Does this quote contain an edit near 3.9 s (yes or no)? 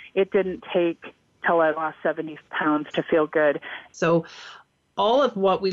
yes